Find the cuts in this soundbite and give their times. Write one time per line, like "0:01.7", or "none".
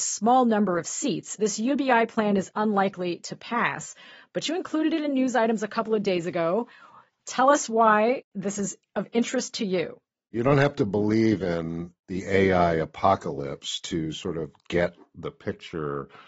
0:01.4